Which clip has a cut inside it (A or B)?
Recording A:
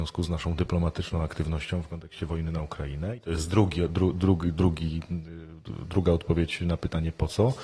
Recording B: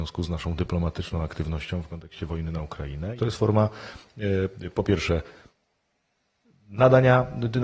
B